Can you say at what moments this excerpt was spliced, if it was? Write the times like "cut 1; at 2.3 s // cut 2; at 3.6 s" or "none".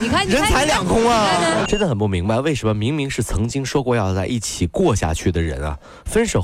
cut 1; at 1.7 s